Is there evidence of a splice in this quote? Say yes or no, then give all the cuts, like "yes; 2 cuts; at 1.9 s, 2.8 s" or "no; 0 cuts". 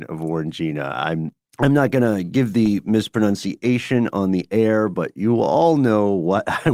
no; 0 cuts